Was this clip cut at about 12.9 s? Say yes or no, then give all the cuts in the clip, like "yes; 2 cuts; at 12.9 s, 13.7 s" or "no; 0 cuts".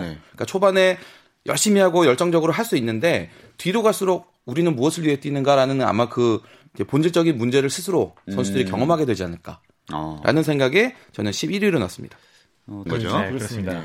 yes; 1 cut; at 12.9 s